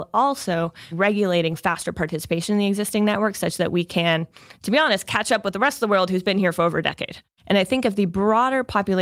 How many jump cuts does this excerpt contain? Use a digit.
2